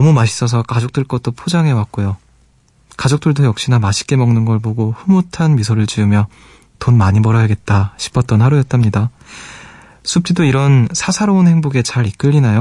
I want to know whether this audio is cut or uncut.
uncut